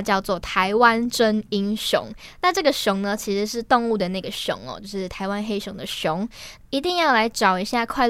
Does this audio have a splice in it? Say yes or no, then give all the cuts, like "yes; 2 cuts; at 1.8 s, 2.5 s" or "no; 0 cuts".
yes; 1 cut; at 6.6 s